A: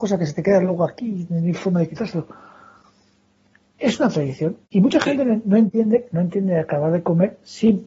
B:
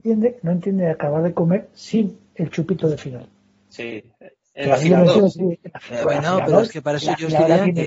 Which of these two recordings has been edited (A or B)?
A